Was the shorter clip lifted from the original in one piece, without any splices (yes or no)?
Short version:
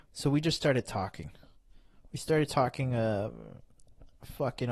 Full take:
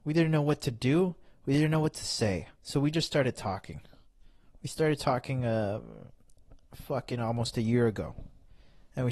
yes